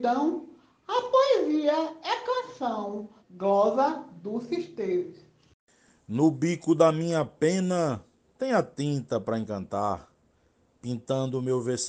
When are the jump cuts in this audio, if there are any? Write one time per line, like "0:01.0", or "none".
0:03.2